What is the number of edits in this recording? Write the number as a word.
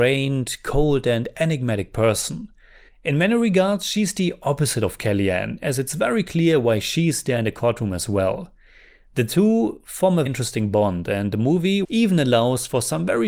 three